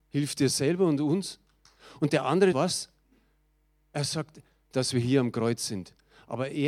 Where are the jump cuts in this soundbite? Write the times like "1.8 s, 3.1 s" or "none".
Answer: 2.5 s, 4.7 s